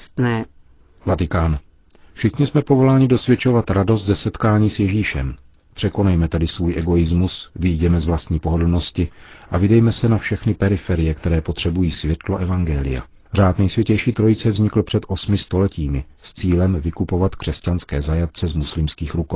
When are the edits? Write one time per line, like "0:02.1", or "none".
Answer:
0:13.3